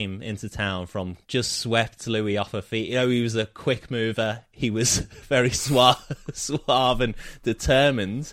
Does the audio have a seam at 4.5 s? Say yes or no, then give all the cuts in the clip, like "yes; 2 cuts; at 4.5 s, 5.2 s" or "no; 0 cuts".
no; 1 cut; at 1.2 s